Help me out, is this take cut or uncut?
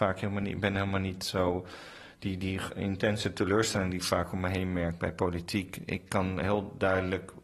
uncut